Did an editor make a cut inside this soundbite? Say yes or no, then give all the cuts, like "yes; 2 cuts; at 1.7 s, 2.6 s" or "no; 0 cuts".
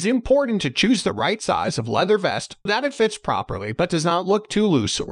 yes; 1 cut; at 2.7 s